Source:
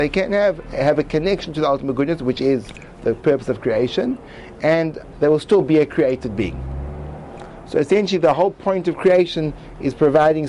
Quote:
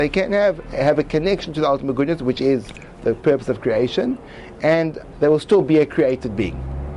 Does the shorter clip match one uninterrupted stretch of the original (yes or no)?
yes